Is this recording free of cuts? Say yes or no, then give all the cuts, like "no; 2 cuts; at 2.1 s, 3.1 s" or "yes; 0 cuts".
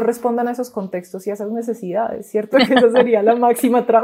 no; 1 cut; at 2.5 s